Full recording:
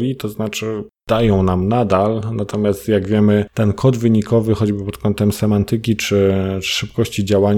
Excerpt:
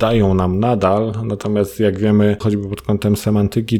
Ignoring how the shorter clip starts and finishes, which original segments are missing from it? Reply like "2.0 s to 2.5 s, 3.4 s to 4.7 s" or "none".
3.5 s to 4.6 s